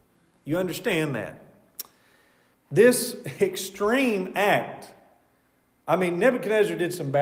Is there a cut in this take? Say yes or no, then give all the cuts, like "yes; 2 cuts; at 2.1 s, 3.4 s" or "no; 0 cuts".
yes; 1 cut; at 2.5 s